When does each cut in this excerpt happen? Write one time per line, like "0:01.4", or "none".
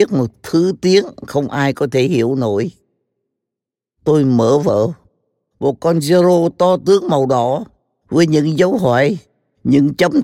none